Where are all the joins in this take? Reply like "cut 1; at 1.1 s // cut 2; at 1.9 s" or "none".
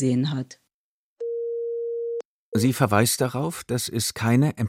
cut 1; at 2.5 s

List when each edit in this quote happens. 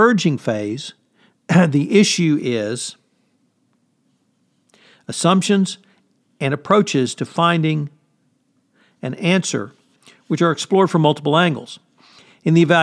none

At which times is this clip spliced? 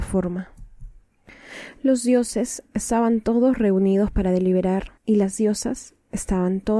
cut 1; at 5.0 s

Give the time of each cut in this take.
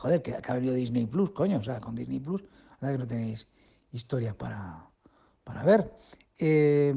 none

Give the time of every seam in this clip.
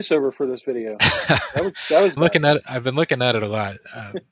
cut 1; at 2.2 s

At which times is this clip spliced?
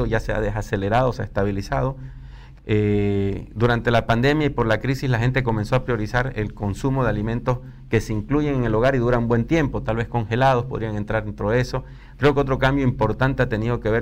cut 1; at 2.6 s // cut 2; at 12.2 s

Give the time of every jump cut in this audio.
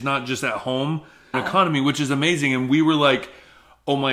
cut 1; at 1.3 s

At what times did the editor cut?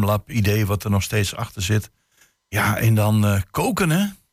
none

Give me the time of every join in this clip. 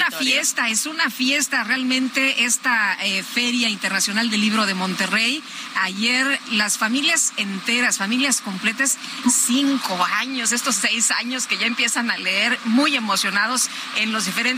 cut 1; at 9.2 s

